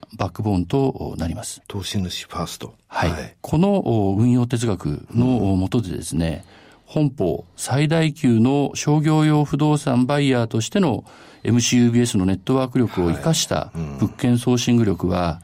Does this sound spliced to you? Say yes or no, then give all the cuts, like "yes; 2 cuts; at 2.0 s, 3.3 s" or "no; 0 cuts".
yes; 1 cut; at 3.4 s